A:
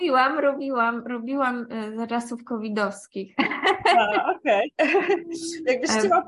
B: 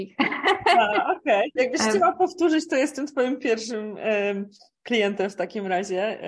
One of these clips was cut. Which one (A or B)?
B